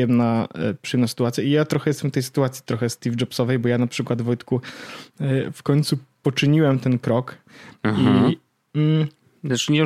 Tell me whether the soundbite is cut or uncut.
cut